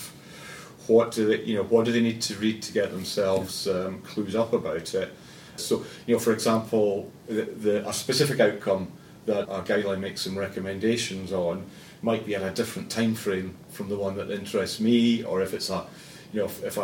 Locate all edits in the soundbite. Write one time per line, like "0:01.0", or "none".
0:05.6
0:09.4
0:15.2